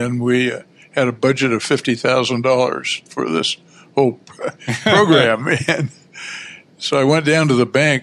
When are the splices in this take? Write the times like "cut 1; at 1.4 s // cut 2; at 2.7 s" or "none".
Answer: none